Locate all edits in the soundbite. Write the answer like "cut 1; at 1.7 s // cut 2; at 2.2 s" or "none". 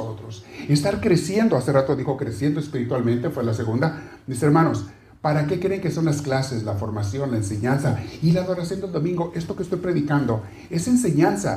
none

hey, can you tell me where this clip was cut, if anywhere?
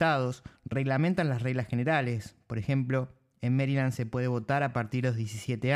none

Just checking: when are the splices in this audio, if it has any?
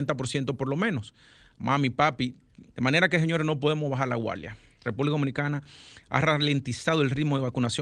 cut 1; at 2.7 s // cut 2; at 4.8 s

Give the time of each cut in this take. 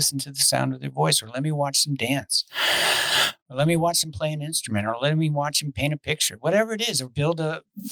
none

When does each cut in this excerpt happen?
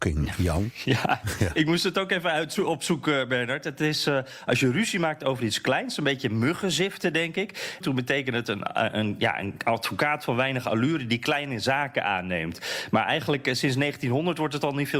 cut 1; at 7.8 s

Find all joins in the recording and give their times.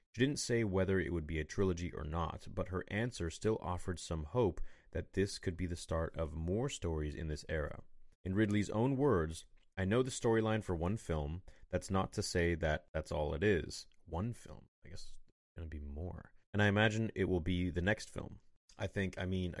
cut 1; at 16.4 s

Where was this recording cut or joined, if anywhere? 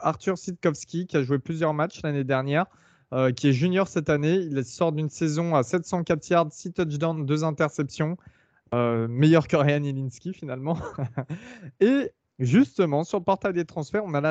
none

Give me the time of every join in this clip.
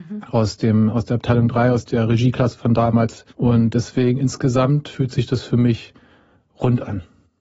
cut 1; at 3.3 s

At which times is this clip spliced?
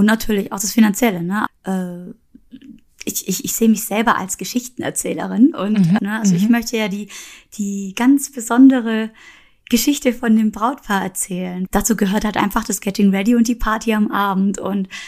cut 1; at 1.5 s // cut 2; at 6.0 s // cut 3; at 11.7 s

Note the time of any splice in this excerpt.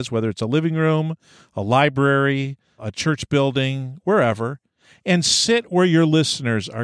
cut 1; at 2.8 s

